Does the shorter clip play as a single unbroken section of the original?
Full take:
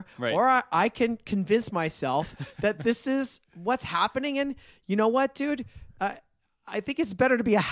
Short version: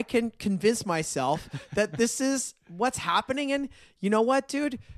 yes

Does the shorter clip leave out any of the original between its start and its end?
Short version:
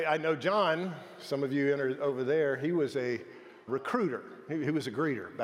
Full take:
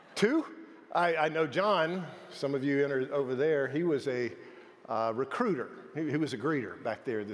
yes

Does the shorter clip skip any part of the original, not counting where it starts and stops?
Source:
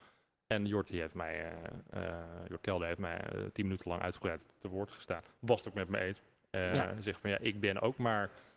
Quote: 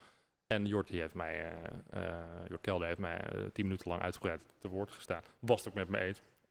no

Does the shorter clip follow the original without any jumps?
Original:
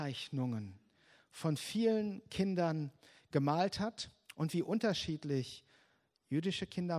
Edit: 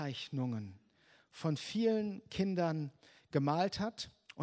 yes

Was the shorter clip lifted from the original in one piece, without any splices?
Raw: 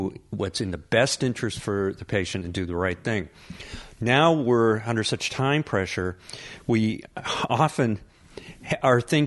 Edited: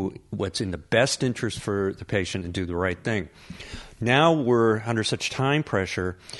yes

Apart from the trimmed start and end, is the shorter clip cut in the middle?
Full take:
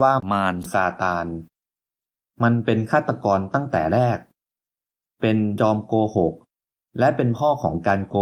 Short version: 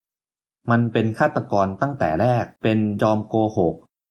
yes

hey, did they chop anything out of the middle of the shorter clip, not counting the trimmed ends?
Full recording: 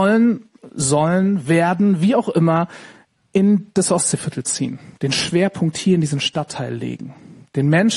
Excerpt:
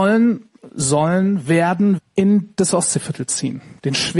yes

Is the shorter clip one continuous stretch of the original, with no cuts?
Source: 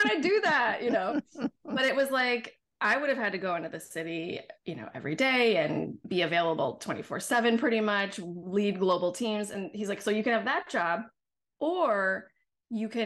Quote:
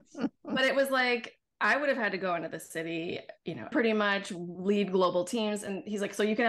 no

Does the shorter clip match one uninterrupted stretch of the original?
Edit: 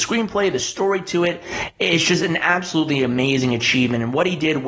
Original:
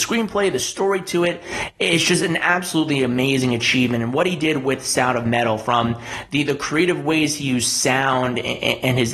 yes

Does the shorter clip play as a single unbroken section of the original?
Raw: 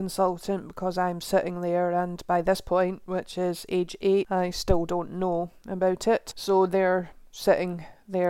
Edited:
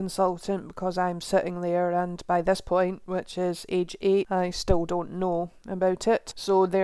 yes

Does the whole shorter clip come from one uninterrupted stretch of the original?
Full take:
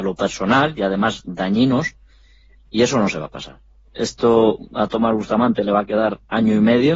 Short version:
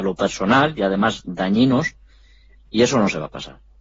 yes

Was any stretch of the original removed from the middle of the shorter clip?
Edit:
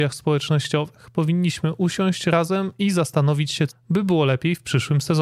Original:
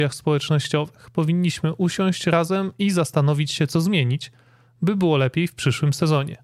yes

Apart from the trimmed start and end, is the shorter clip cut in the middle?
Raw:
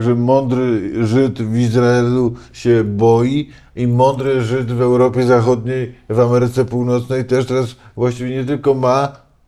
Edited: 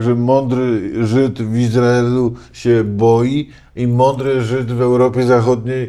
no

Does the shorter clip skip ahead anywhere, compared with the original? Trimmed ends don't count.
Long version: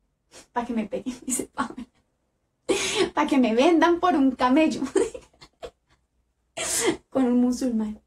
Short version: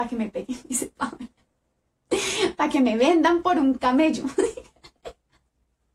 no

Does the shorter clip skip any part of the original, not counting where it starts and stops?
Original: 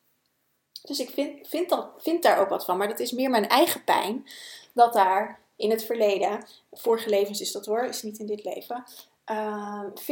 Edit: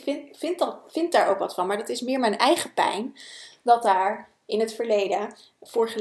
no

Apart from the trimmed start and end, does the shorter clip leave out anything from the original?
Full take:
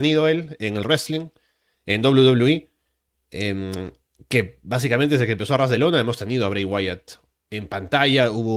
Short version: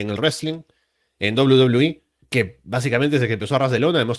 yes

